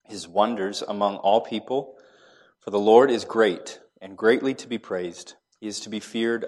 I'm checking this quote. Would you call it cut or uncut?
uncut